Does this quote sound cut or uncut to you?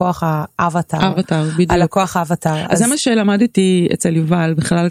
uncut